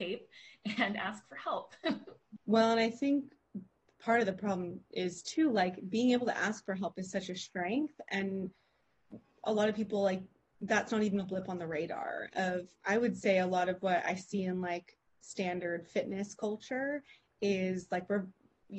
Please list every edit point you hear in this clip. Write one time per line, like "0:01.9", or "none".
0:02.4